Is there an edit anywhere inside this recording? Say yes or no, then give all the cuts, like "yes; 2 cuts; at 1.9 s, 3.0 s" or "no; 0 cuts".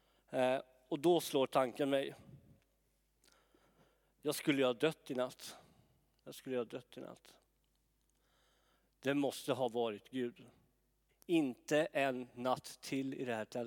yes; 2 cuts; at 6.2 s, 11.1 s